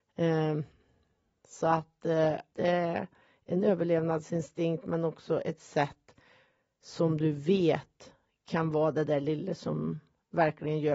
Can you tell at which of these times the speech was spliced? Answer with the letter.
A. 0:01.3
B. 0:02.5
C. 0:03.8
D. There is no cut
B